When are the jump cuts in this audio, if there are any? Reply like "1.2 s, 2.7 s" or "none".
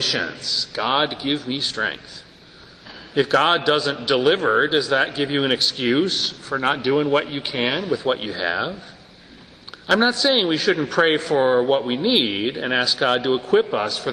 9.8 s